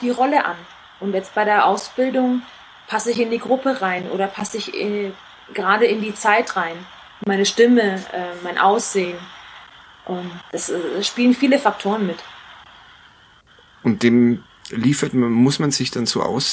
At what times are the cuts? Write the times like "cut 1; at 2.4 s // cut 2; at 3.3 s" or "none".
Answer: cut 1; at 10.4 s